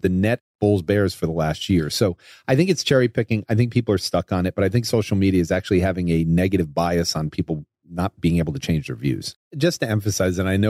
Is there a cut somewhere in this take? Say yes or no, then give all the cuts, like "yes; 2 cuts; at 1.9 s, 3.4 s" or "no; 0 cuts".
no; 0 cuts